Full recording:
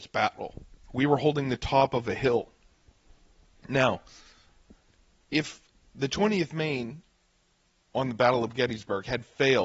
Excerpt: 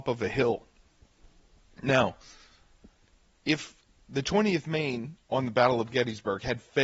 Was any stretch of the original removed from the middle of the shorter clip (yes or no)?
yes